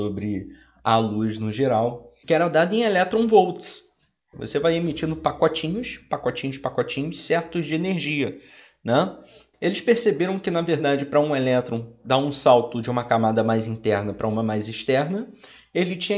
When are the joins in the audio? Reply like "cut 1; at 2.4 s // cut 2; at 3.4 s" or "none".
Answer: cut 1; at 2.2 s // cut 2; at 4.3 s // cut 3; at 9.5 s